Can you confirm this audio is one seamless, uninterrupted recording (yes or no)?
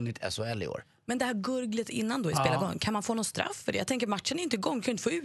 yes